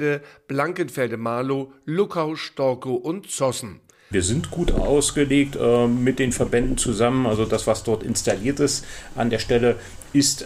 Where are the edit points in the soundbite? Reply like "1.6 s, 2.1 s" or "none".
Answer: 4.1 s

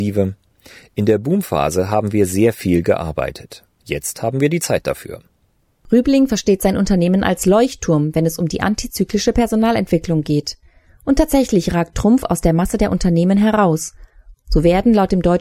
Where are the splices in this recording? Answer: 3.7 s

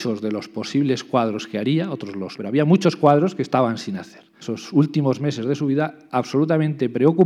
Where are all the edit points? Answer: 2.4 s, 4.4 s

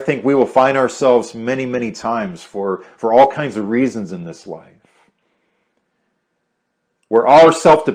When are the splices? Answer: none

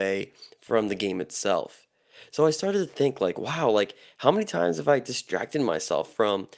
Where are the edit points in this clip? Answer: none

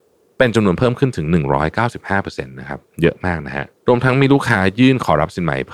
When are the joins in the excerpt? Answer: 3.8 s

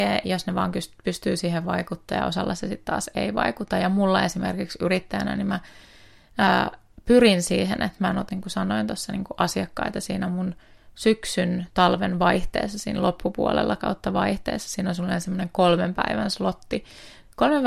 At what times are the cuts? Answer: 8.3 s

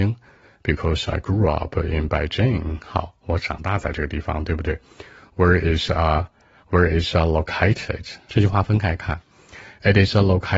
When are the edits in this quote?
8.3 s

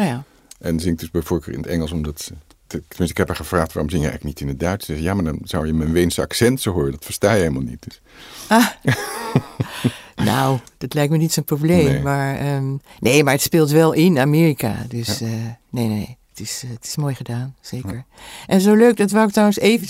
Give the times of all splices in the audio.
none

